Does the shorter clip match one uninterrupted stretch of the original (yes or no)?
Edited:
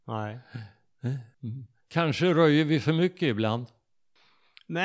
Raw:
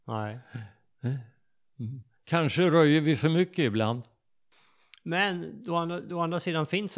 no